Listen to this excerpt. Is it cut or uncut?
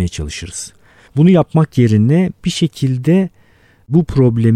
uncut